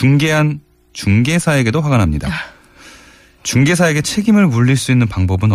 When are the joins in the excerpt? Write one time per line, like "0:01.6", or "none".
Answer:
none